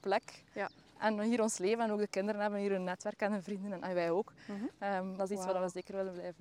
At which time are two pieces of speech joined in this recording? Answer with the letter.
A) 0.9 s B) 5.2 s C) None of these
B